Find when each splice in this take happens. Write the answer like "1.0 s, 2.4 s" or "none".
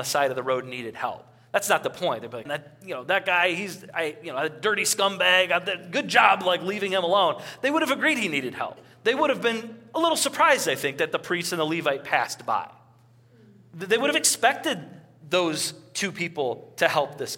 2.5 s